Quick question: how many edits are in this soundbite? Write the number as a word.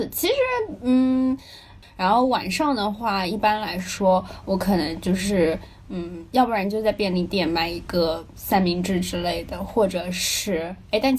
one